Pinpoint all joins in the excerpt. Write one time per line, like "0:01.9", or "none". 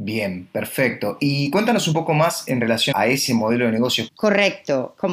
0:02.9
0:04.1